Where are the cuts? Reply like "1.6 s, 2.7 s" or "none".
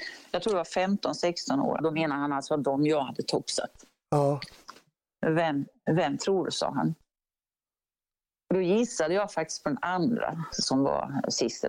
1.8 s